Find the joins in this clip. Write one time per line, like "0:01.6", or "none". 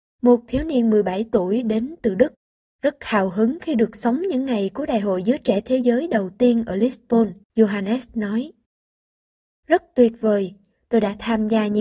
0:07.4